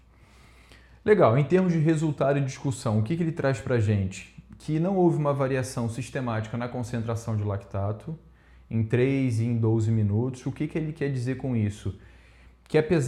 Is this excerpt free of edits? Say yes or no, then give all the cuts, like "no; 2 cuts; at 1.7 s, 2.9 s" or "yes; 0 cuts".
yes; 0 cuts